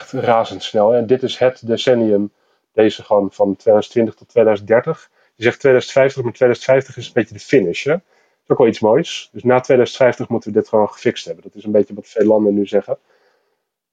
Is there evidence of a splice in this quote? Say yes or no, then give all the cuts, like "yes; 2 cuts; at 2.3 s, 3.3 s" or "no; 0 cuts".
no; 0 cuts